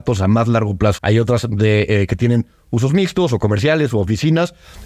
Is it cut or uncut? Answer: cut